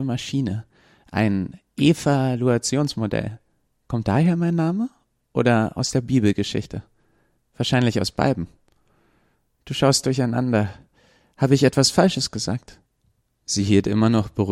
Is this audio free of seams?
yes; 0 cuts

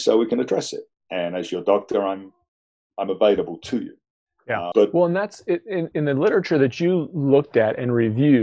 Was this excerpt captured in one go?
no; 2 cuts; at 4.7 s, 5.9 s

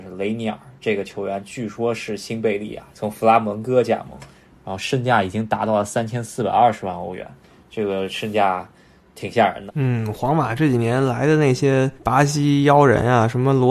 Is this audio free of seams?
no; 2 cuts; at 9.7 s, 12.0 s

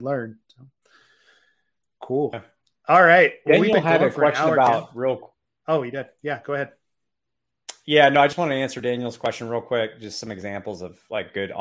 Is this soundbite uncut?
yes; 0 cuts

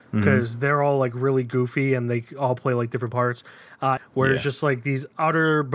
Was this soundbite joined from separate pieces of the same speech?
yes; 1 cut; at 4.0 s

